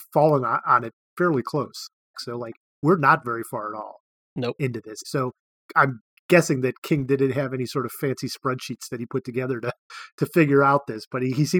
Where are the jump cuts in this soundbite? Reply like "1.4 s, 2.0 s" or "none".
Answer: 2.1 s, 5.0 s